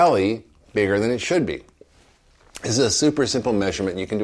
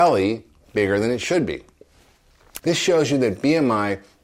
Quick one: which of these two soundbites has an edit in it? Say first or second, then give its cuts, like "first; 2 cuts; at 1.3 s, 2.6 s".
second; 1 cut; at 2.6 s